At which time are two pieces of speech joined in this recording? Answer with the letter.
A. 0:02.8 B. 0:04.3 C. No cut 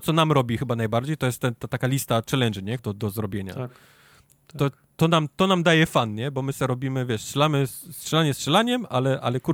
A